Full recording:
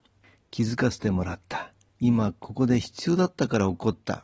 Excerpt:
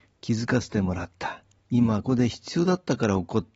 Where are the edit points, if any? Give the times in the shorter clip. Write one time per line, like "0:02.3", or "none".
0:02.0